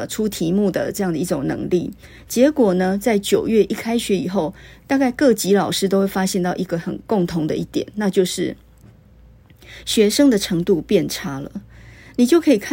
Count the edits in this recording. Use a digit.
0